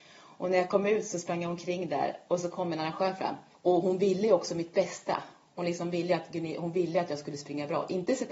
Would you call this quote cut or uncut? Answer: cut